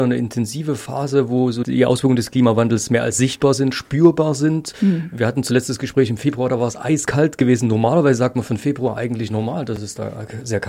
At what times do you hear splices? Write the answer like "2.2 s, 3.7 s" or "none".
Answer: none